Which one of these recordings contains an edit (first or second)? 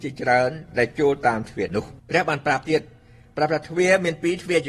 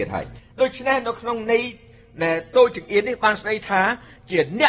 first